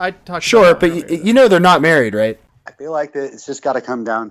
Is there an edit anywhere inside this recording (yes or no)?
yes